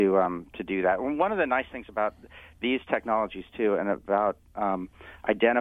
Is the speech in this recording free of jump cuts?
yes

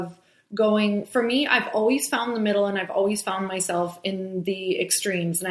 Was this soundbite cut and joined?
no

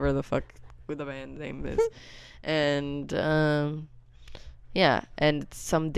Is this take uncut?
yes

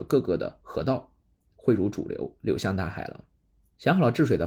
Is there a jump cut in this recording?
no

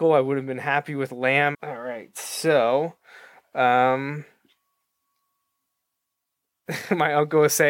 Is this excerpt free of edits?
no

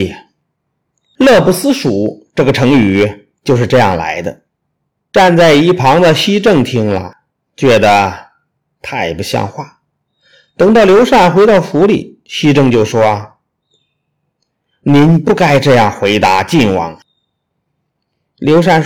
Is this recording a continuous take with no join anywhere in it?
yes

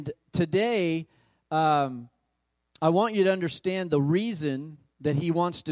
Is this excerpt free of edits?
yes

